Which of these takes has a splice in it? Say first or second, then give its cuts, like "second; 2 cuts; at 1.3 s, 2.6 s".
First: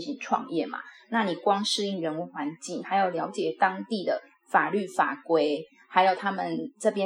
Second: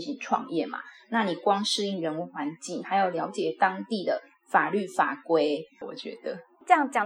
second; 1 cut; at 5.8 s